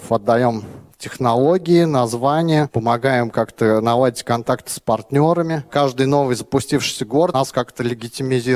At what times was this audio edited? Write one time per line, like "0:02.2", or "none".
none